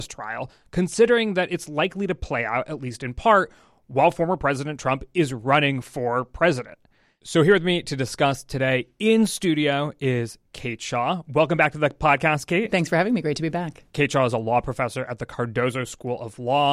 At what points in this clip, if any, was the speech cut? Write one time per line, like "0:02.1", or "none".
none